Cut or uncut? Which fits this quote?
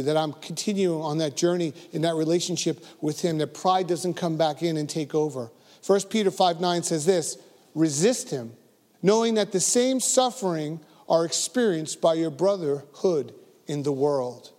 cut